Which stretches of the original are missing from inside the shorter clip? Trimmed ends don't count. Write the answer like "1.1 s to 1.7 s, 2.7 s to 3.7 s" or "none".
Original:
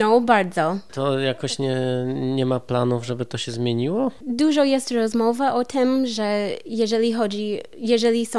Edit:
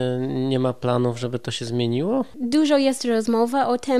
none